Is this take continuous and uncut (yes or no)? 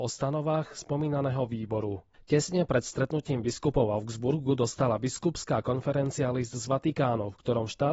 no